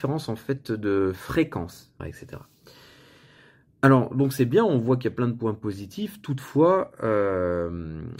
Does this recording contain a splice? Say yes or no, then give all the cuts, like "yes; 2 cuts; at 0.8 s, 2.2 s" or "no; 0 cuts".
yes; 1 cut; at 2.0 s